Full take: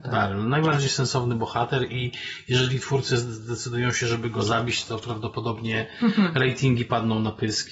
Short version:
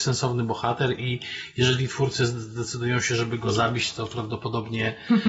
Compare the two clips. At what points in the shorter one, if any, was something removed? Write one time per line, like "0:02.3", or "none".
none

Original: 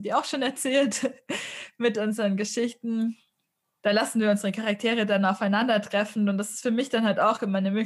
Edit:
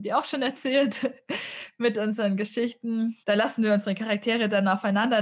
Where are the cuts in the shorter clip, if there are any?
0:03.2

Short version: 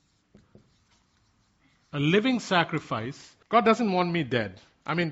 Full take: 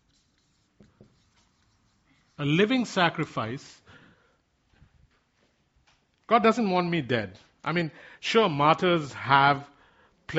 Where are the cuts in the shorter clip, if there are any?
0:03.4

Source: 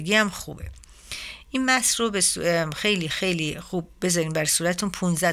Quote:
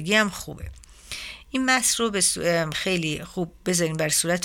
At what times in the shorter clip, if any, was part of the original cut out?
0:02.7

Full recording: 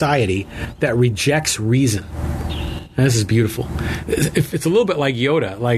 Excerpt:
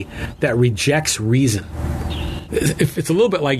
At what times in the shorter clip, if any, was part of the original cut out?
0:02.5

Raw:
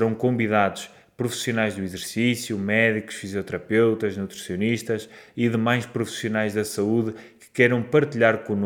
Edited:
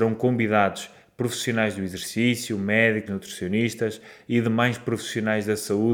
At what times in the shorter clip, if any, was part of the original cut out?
0:03.1

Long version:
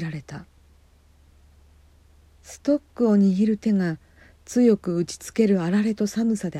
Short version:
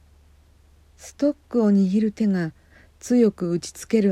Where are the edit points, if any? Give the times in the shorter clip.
none

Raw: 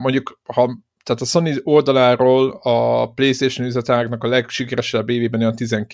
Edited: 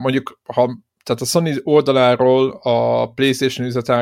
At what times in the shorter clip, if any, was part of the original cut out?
none

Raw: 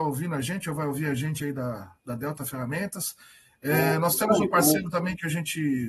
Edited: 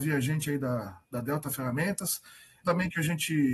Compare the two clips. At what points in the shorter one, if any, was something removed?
0:02.6

